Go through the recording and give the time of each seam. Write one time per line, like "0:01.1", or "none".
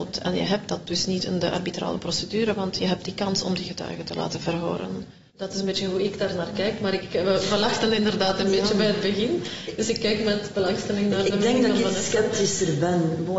0:05.3